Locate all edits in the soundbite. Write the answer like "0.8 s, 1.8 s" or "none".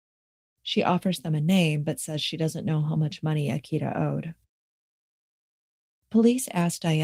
none